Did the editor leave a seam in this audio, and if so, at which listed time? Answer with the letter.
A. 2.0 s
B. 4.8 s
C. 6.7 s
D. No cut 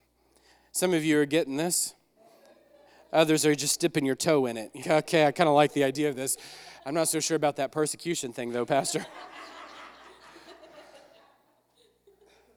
B